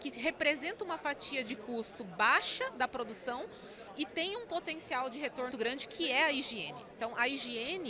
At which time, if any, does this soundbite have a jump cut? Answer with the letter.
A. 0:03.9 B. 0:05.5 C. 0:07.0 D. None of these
B